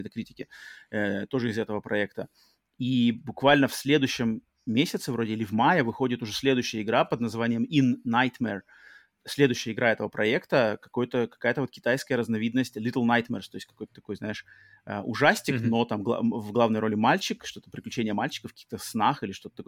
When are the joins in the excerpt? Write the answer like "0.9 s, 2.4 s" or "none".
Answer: none